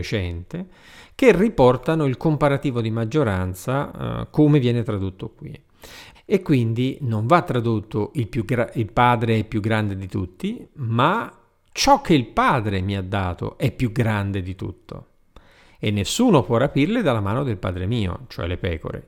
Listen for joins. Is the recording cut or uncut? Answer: cut